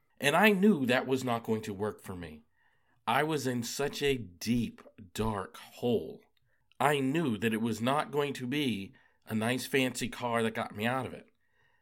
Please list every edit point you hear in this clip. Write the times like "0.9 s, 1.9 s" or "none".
none